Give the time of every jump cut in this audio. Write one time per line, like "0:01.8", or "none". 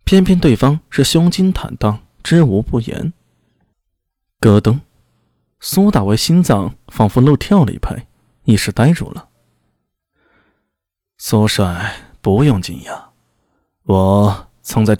0:03.7